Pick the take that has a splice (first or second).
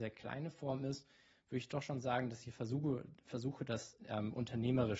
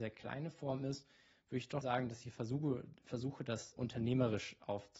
second